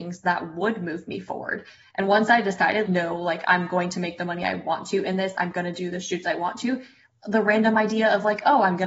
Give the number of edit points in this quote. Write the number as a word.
one